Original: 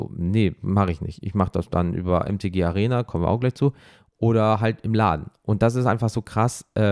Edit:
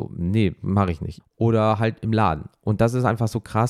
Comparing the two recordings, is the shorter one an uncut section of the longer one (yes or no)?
no